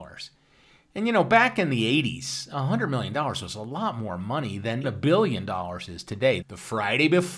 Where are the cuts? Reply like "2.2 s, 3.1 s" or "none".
4.8 s, 6.4 s